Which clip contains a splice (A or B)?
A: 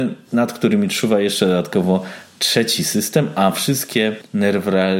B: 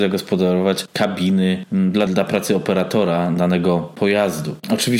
B